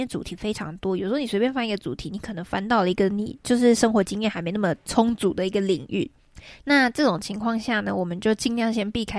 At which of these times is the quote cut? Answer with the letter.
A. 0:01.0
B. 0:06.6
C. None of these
B